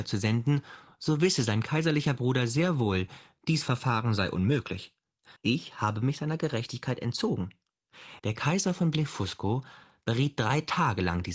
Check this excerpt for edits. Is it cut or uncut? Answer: cut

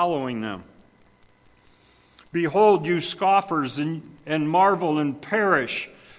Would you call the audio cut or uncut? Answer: uncut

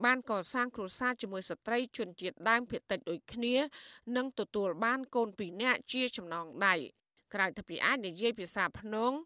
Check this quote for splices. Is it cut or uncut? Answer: uncut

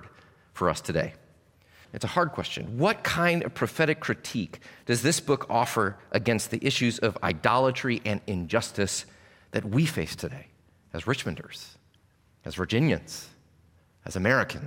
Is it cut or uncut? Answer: cut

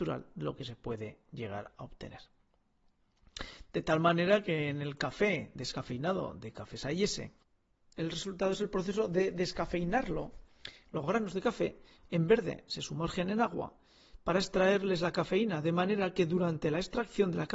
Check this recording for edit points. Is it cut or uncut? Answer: uncut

